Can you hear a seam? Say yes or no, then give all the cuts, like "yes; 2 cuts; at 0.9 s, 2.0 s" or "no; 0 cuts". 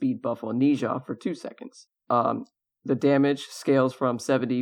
yes; 1 cut; at 2.0 s